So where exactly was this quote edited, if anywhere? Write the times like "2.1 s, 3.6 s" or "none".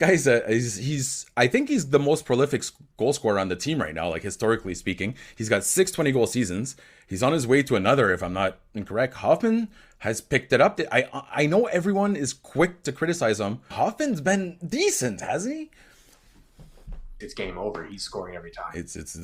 13.7 s, 17.2 s